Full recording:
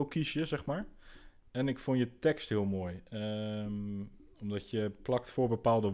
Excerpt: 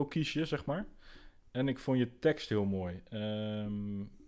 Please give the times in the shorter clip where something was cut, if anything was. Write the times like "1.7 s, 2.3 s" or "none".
none